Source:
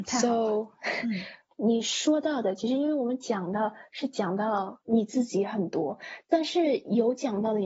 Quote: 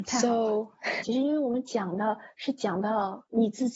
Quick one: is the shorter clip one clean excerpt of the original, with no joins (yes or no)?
no